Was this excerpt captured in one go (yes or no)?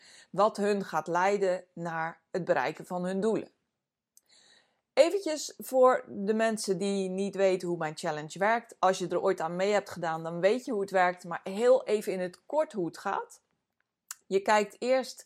yes